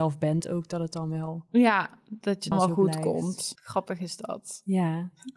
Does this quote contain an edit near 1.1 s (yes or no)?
no